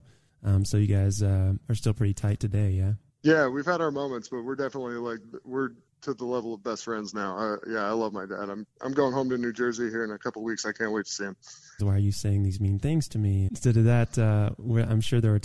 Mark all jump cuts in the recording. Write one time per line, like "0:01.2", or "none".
0:11.8
0:13.5